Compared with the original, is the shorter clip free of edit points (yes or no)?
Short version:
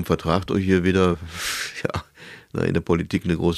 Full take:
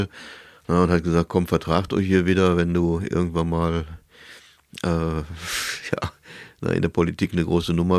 no